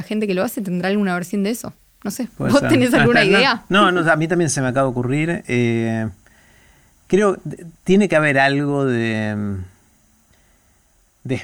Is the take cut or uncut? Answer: uncut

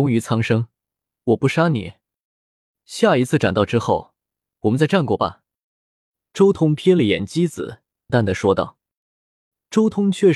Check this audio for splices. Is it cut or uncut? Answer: cut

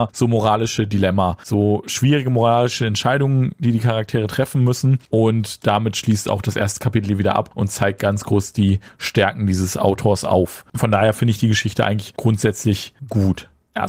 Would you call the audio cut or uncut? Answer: uncut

